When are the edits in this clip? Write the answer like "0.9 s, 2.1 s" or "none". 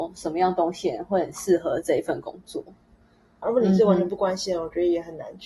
3.4 s